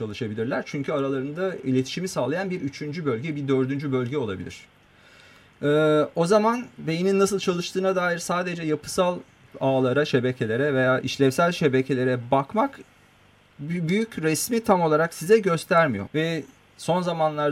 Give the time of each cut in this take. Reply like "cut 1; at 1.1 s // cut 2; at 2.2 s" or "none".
cut 1; at 11.0 s // cut 2; at 16.1 s